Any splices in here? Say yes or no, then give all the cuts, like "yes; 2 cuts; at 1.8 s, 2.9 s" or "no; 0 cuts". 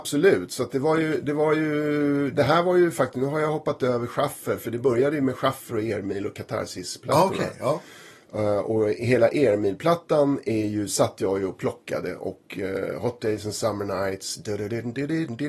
no; 0 cuts